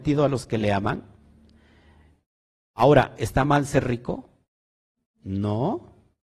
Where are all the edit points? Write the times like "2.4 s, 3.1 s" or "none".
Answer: none